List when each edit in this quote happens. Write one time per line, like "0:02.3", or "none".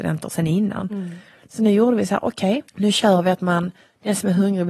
0:02.7